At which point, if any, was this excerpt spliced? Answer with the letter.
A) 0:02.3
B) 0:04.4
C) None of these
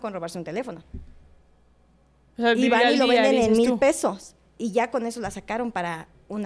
C